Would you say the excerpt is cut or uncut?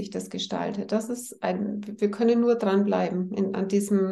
uncut